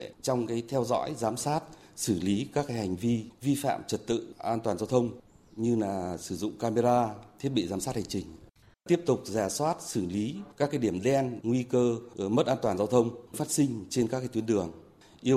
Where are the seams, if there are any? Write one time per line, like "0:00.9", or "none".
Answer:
0:08.7
0:11.4